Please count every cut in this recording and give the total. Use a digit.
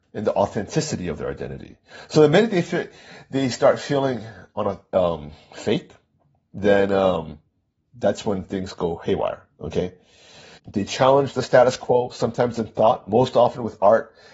1